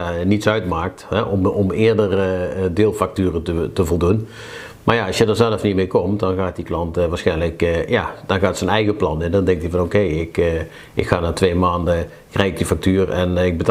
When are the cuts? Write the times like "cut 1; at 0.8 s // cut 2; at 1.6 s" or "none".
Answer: none